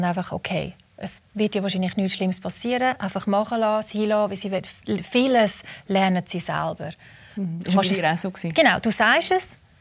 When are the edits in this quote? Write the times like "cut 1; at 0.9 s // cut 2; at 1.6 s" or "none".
none